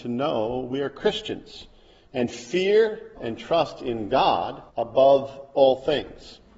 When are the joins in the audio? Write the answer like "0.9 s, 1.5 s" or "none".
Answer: 3.1 s, 4.7 s